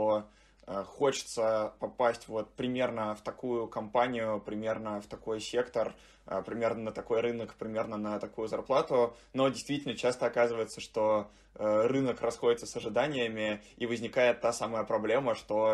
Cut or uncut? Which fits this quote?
uncut